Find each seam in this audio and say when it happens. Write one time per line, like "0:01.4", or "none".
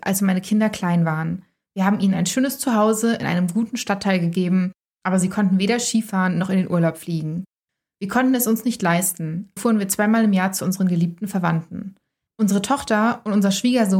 0:09.6
0:12.3